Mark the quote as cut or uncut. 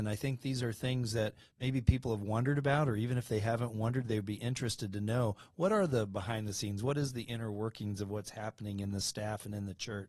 uncut